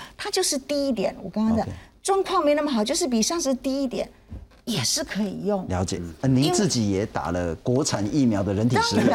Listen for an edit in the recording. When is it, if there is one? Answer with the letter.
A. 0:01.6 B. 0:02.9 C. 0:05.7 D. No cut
D